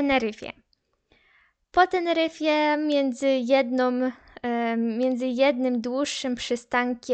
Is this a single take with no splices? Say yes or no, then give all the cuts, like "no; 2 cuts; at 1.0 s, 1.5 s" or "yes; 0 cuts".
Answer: yes; 0 cuts